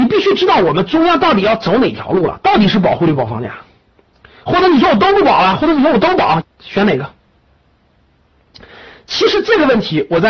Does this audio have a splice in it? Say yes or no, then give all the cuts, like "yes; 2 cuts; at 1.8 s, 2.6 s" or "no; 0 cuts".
yes; 1 cut; at 6.4 s